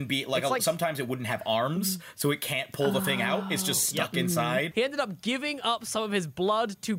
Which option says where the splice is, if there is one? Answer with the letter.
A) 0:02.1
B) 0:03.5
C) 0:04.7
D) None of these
C